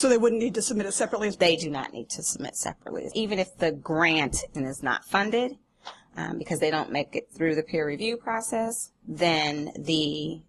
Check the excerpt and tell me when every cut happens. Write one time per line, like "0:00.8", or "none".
none

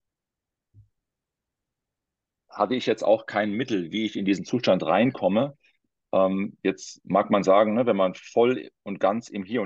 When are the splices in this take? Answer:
none

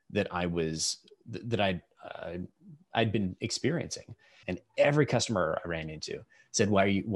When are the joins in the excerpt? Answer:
0:04.4

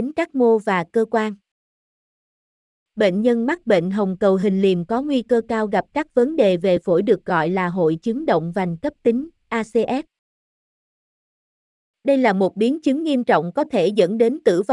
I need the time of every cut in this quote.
0:02.7

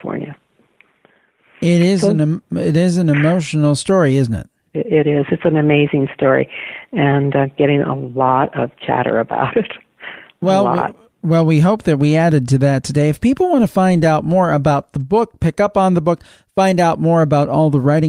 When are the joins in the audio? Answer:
none

